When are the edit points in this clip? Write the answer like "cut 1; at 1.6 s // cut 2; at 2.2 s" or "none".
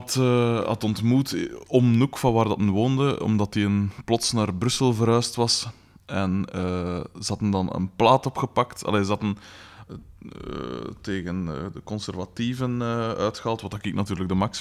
cut 1; at 9.9 s